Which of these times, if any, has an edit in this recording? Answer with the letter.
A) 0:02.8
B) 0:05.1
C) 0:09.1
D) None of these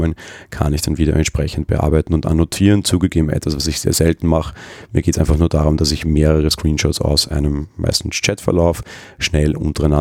D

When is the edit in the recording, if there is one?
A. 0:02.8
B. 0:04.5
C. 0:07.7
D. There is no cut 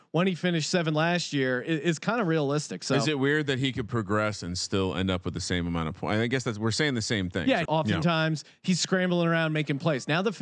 C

